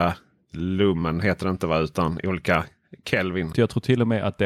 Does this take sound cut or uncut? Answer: cut